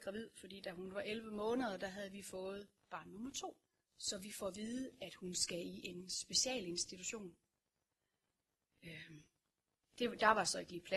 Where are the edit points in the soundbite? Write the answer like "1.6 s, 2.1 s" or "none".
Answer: 3.8 s